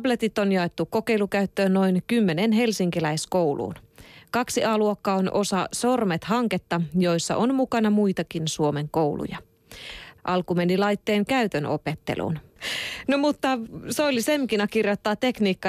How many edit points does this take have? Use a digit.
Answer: 2